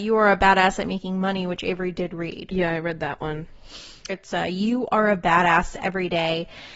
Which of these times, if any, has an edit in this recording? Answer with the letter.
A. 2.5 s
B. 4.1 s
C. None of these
B